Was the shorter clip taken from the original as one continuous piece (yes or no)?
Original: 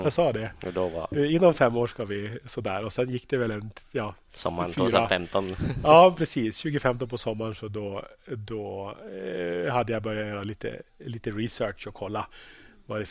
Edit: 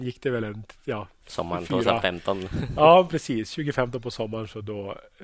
yes